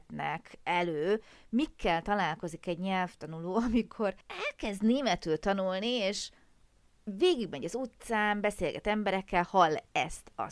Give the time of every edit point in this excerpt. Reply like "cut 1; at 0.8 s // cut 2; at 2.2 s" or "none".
cut 1; at 4.2 s